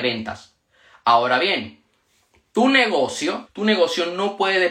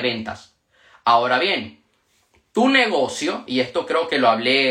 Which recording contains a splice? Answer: first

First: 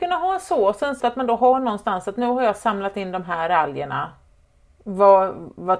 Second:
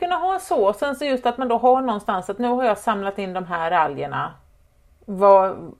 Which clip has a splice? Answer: first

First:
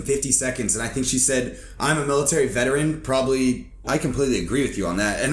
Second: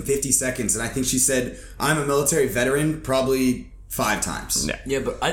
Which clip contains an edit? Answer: first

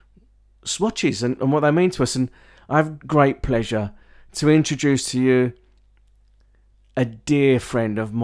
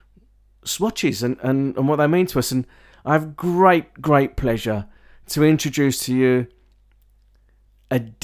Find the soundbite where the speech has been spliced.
first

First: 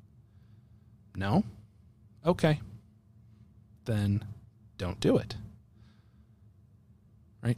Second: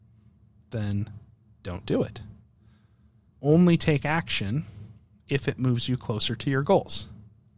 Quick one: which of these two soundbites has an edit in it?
second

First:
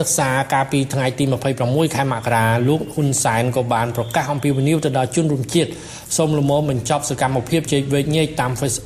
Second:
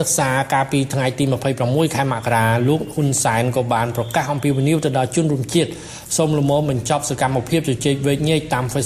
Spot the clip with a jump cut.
first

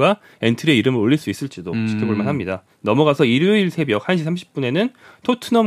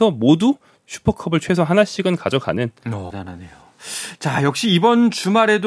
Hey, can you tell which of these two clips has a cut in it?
second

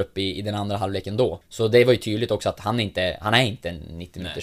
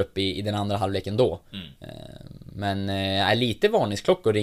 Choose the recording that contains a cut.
first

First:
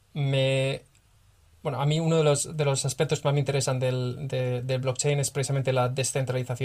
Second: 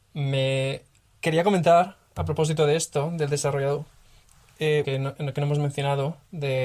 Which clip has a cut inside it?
second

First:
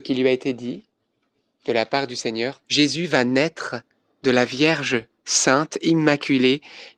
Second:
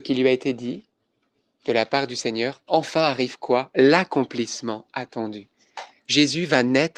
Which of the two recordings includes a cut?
first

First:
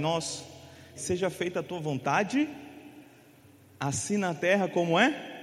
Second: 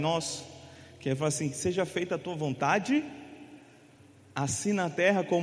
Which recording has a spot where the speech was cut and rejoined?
first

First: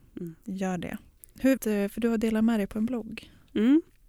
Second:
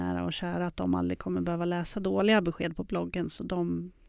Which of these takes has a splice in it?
first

